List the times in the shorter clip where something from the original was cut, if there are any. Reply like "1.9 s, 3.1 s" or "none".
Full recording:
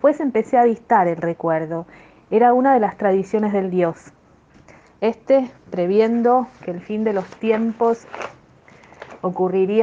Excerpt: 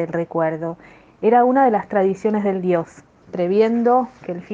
3.2 s